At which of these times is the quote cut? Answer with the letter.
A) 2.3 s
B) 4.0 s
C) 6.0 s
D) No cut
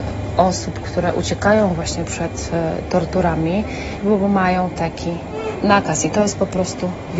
B